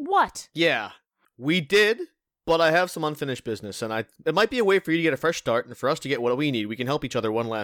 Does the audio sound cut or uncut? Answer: uncut